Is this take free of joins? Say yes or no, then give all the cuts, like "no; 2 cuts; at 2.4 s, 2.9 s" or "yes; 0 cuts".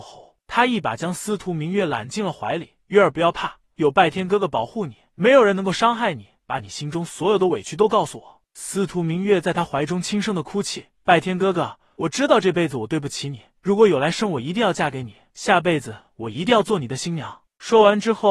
yes; 0 cuts